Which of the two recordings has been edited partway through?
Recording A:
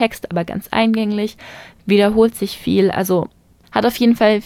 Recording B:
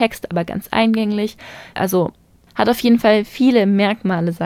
B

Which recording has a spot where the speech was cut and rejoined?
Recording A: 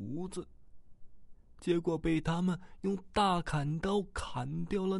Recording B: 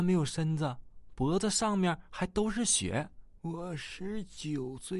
B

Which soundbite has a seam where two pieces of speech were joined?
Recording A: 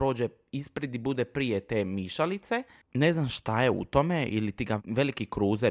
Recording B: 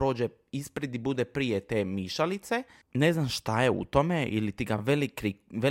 A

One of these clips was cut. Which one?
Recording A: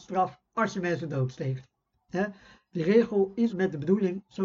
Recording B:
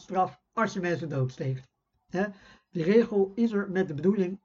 A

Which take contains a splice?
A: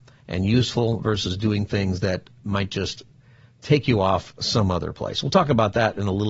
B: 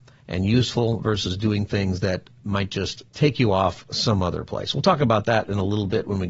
B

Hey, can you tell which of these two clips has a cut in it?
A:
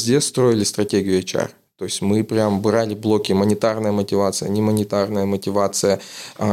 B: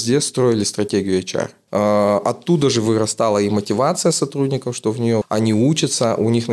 B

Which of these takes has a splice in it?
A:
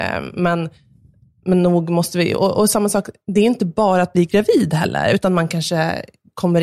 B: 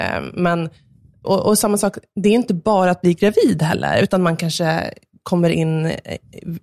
B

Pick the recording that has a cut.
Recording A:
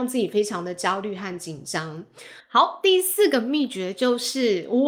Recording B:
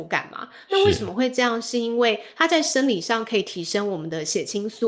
A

